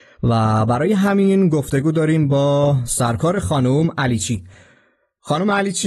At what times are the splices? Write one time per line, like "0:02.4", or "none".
none